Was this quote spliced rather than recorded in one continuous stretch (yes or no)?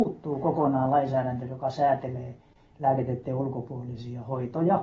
no